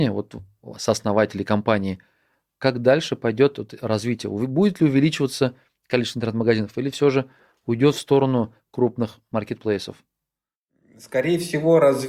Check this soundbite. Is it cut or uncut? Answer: uncut